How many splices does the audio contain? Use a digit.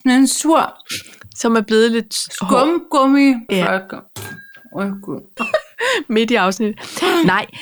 2